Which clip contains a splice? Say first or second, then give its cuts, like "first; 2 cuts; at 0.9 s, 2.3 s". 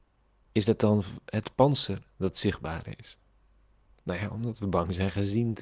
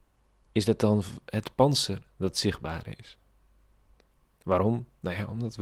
first; 1 cut; at 4.0 s